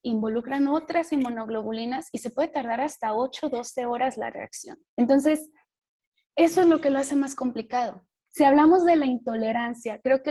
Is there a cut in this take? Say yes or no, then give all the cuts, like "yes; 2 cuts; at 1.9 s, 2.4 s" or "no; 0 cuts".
yes; 2 cuts; at 4.9 s, 8.3 s